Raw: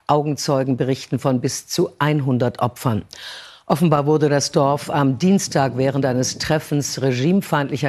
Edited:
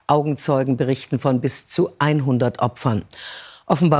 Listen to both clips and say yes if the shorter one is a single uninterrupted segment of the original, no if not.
yes